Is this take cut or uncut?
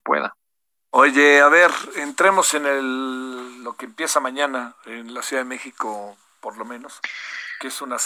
uncut